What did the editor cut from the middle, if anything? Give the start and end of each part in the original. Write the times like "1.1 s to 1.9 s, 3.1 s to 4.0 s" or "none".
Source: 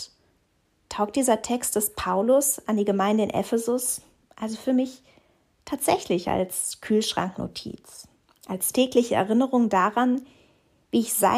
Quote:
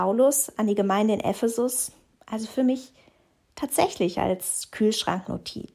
none